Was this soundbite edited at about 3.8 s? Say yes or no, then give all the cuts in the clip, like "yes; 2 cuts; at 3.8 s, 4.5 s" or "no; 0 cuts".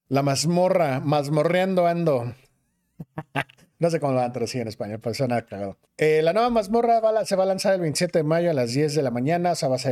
no; 1 cut; at 5.9 s